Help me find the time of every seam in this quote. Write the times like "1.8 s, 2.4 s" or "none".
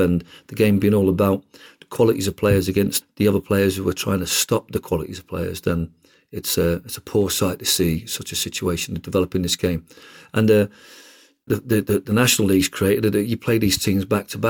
3.0 s, 11.5 s